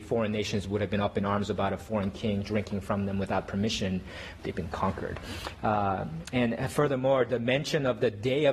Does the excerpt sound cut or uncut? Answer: cut